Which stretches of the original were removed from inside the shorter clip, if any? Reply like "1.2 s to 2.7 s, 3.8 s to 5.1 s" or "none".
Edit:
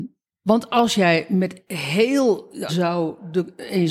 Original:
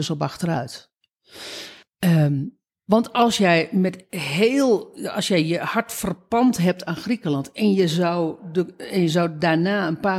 5.1 s to 7.9 s